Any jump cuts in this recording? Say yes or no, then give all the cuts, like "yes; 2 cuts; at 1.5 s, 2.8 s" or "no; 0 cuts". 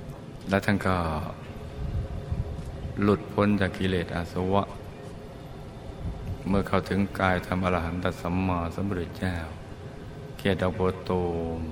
no; 0 cuts